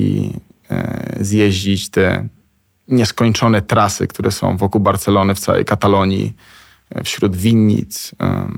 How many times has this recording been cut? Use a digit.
0